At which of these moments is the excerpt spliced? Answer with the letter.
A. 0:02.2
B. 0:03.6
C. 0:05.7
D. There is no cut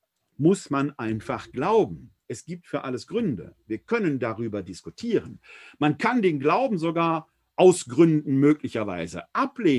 D